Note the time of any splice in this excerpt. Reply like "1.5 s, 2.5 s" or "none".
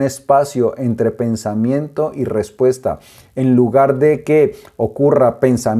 none